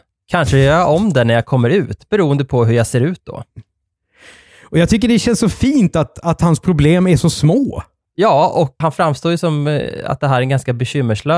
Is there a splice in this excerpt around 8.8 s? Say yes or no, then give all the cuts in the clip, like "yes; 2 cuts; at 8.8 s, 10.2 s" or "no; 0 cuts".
yes; 1 cut; at 8.8 s